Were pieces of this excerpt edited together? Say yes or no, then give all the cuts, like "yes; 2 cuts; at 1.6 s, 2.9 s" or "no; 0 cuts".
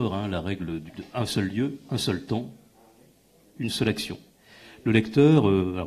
no; 0 cuts